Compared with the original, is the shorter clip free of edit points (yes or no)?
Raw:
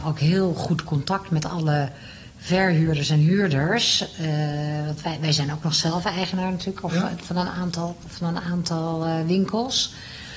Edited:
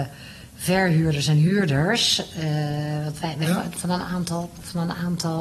no